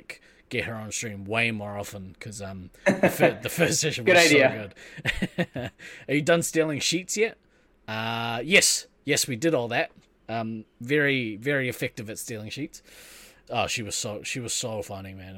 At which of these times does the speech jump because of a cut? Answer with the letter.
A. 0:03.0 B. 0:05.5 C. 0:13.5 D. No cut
C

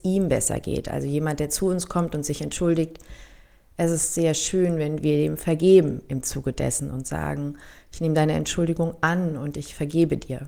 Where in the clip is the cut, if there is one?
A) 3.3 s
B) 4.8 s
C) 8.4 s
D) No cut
D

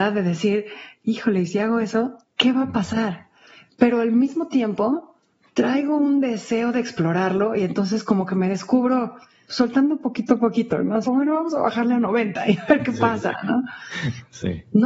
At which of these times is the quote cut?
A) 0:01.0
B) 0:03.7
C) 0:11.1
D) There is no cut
C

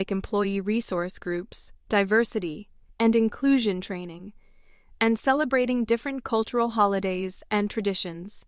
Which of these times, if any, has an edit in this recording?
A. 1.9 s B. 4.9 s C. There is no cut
A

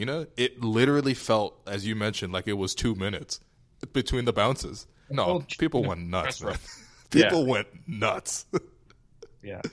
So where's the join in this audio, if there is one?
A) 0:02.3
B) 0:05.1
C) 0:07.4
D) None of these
B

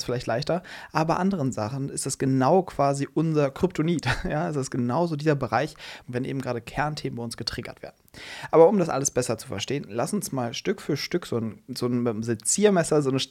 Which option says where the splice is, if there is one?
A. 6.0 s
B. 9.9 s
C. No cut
A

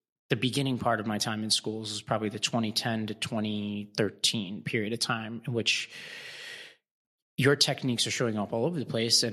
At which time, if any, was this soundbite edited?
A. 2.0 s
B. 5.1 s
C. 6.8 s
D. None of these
D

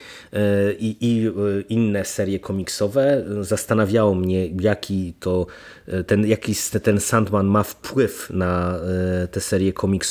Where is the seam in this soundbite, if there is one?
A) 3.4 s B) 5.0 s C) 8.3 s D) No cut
D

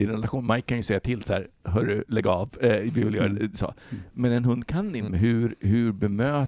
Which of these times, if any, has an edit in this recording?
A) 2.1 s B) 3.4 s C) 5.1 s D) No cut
C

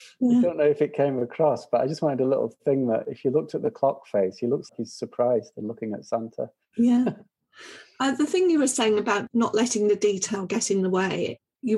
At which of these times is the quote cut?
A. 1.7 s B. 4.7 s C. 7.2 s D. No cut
B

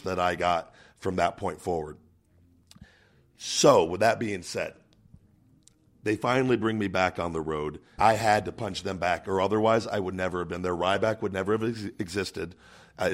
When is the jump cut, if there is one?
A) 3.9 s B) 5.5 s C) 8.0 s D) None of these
C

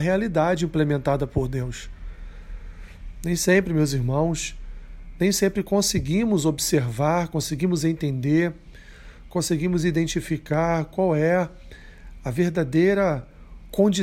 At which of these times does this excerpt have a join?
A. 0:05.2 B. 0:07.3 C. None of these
C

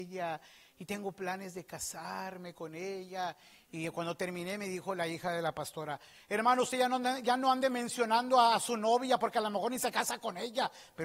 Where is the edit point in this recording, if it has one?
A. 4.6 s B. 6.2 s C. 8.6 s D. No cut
D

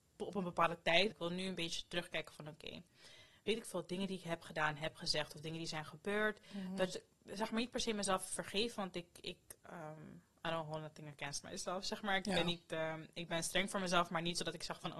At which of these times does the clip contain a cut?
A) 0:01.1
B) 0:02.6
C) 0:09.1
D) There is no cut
A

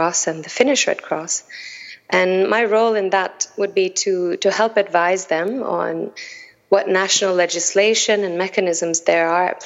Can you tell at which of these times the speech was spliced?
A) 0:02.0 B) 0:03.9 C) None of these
C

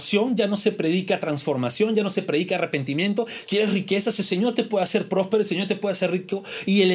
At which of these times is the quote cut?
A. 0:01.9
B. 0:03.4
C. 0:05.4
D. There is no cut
B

